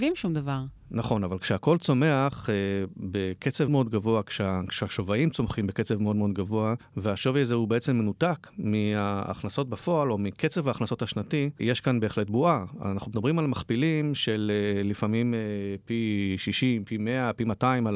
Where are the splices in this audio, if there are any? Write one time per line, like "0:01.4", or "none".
0:03.7